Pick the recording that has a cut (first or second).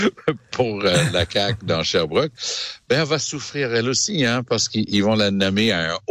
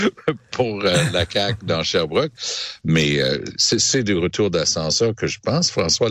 second